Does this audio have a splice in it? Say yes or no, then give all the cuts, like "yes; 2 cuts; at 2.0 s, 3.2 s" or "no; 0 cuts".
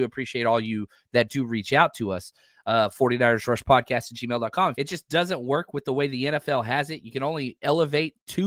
yes; 1 cut; at 4.7 s